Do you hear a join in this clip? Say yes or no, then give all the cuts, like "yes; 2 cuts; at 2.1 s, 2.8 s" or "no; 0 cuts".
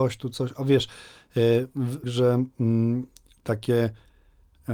yes; 1 cut; at 2.0 s